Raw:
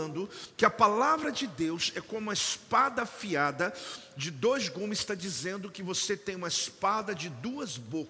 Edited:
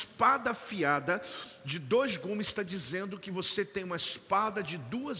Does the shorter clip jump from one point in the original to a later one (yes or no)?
no